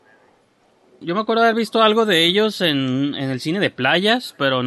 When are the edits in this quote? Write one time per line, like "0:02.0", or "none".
0:01.0